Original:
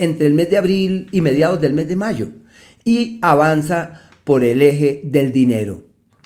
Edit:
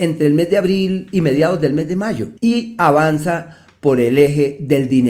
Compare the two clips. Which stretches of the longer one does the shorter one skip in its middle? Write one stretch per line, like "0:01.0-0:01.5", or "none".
0:02.4-0:02.8